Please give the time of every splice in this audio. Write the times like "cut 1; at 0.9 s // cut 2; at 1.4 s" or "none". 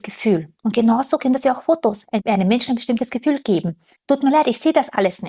cut 1; at 4.0 s